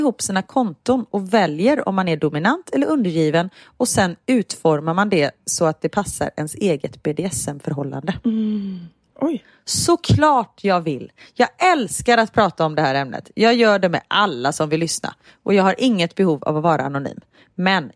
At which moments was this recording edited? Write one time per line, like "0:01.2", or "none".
0:09.1